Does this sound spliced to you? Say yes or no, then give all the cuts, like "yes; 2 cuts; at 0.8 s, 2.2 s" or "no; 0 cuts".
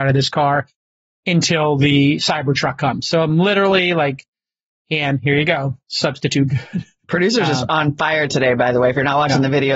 no; 0 cuts